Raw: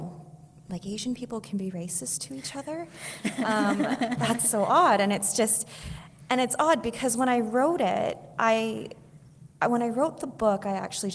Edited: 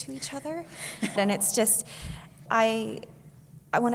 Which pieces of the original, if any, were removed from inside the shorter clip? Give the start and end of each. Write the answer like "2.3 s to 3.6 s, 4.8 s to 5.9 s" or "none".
3.4 s to 5.0 s, 6.3 s to 8.3 s